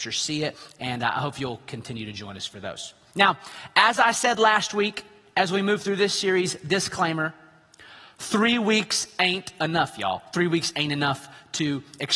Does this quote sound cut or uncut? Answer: uncut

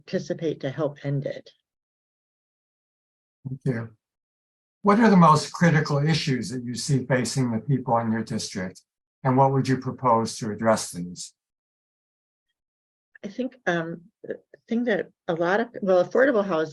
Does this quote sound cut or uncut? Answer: uncut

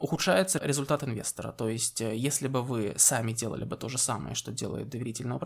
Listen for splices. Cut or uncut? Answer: uncut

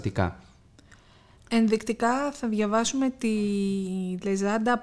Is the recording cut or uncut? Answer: uncut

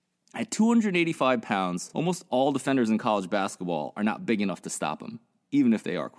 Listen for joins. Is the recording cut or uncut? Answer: uncut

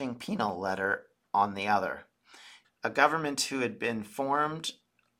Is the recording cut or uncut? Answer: cut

